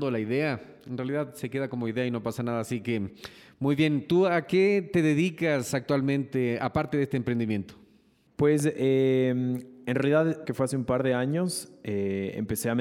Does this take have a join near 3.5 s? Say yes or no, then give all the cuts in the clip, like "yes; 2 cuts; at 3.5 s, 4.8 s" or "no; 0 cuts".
no; 1 cut; at 10.4 s